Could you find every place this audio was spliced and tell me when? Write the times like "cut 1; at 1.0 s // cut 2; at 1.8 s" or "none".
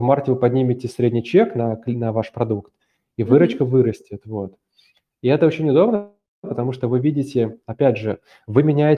none